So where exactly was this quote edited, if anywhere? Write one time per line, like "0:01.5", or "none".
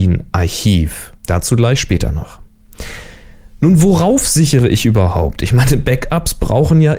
0:01.2